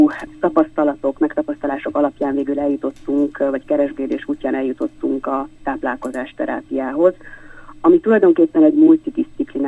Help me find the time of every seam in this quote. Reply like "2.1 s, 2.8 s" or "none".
none